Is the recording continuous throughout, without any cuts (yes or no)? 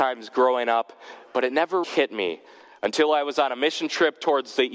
no